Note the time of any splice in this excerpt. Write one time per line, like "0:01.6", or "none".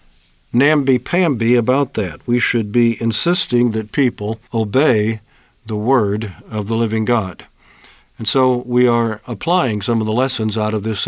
0:04.5